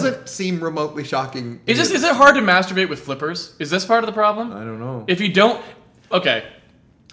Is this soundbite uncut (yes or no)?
no